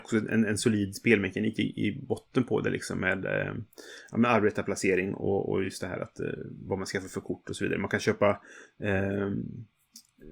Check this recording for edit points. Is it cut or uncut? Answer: uncut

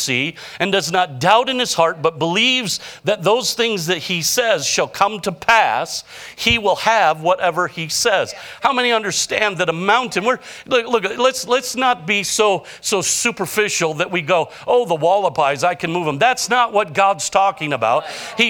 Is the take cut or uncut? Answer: uncut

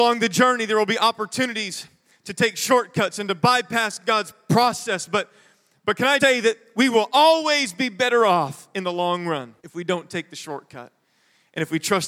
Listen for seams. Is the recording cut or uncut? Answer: cut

